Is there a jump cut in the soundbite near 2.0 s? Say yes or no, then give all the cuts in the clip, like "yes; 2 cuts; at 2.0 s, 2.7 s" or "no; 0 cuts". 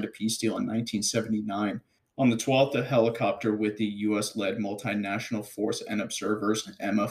yes; 1 cut; at 2.0 s